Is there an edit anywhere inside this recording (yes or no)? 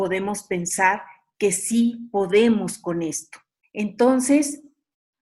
yes